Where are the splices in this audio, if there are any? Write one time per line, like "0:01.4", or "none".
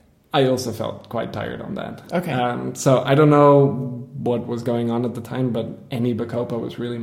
none

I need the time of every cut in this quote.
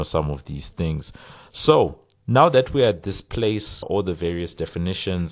0:02.2
0:03.8

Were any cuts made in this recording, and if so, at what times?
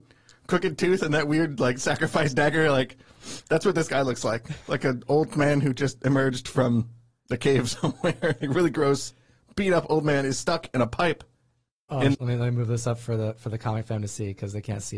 0:12.1

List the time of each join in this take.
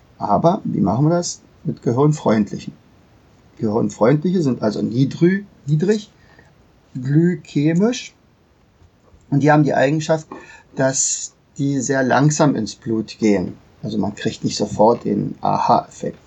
none

